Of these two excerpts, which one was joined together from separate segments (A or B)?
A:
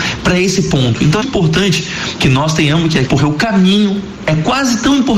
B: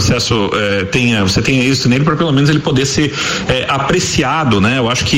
A